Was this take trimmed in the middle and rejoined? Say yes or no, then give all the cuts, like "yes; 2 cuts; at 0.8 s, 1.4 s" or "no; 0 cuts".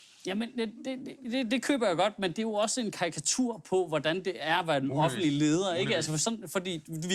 yes; 1 cut; at 1.2 s